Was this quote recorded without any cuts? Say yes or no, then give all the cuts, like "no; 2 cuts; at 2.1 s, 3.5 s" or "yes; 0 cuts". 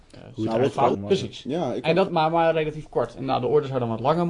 no; 2 cuts; at 0.9 s, 2.1 s